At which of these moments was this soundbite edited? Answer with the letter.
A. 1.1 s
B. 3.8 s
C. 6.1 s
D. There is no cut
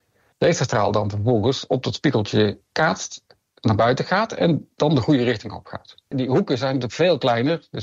C